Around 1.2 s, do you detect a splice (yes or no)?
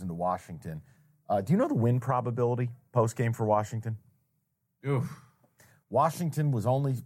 no